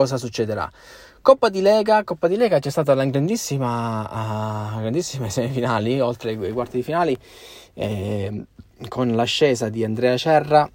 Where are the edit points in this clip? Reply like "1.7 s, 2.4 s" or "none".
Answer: none